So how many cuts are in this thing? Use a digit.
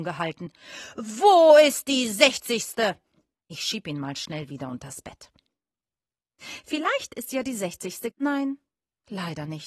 2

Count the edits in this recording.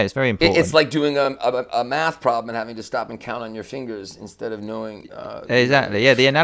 0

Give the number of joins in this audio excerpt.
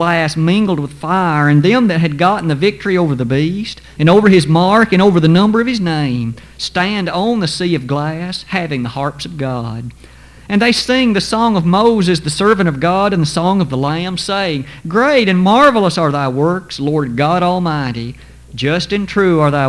1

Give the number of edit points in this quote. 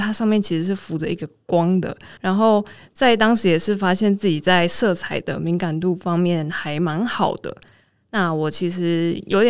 2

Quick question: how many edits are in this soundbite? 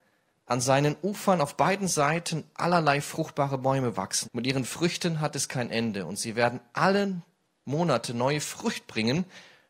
1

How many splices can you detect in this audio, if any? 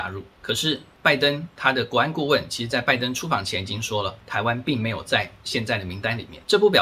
0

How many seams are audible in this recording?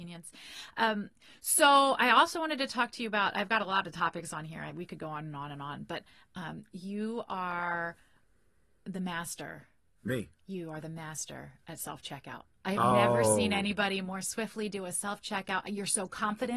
0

